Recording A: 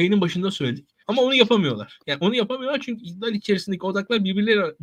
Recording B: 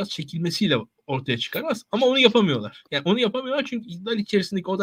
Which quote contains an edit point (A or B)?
A